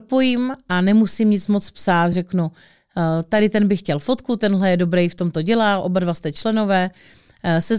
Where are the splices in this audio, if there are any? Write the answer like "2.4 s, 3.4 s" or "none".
none